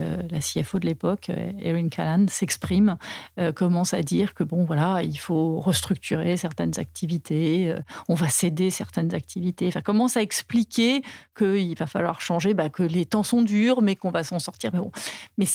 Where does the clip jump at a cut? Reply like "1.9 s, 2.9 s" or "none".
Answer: none